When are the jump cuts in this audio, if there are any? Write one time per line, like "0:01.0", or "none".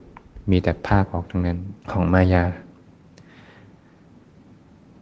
0:01.8